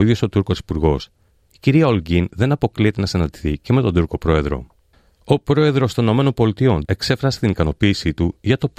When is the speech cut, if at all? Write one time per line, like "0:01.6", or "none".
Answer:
0:06.8